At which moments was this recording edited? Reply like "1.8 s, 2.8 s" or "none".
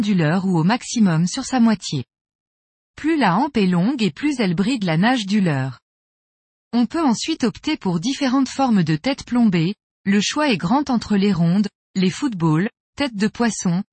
12.8 s